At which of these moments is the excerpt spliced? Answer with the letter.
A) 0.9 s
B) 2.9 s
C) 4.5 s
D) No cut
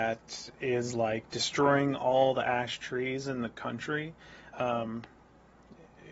C